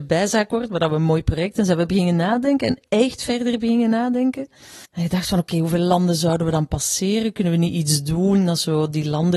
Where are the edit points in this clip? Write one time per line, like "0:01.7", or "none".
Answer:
0:04.9